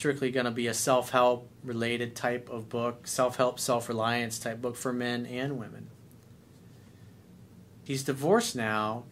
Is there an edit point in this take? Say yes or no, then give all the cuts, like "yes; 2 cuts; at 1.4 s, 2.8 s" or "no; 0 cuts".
yes; 1 cut; at 7.9 s